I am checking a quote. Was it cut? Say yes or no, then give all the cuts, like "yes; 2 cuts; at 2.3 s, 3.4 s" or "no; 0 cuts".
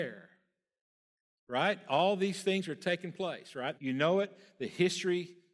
yes; 1 cut; at 3.7 s